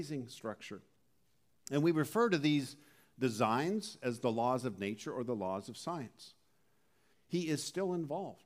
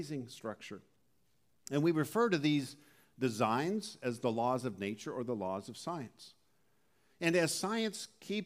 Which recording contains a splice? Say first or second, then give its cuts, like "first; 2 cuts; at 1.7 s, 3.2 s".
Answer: first; 1 cut; at 7.1 s